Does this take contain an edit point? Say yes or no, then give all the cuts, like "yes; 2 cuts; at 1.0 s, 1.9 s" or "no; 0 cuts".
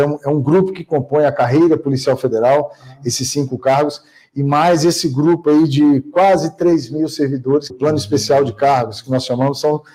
yes; 1 cut; at 7.7 s